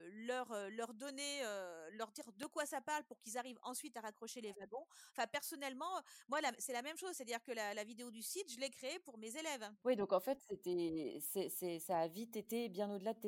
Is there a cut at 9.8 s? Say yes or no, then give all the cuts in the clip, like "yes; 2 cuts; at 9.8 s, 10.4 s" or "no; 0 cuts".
yes; 1 cut; at 9.8 s